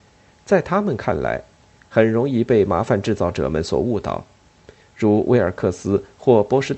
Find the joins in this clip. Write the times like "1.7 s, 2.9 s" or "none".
1.9 s